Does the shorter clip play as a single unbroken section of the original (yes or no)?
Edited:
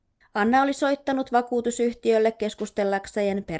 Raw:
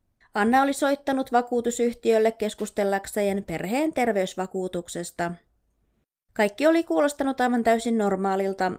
yes